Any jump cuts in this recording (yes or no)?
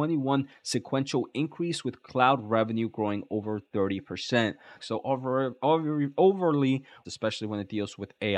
yes